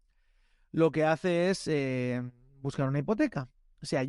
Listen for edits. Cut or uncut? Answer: uncut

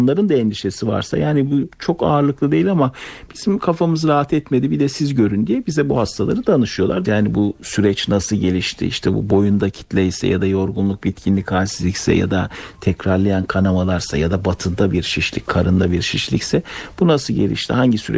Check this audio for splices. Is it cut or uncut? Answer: cut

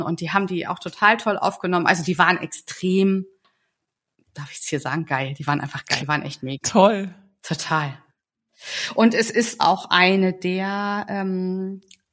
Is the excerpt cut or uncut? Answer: cut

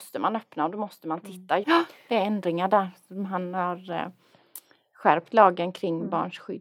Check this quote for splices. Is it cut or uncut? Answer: cut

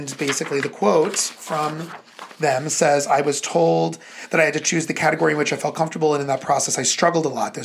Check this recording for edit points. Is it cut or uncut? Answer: uncut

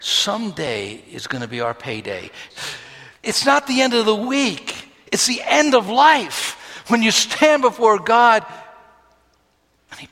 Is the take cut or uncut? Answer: cut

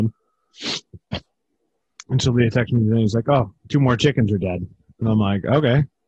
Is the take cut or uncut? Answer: uncut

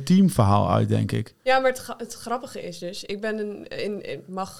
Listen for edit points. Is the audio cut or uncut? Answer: uncut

